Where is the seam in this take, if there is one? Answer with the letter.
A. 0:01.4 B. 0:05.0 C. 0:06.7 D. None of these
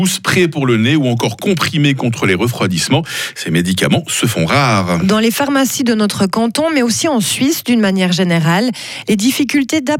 D